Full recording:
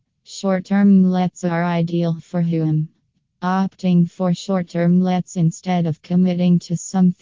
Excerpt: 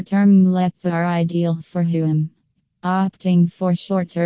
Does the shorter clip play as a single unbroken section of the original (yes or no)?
yes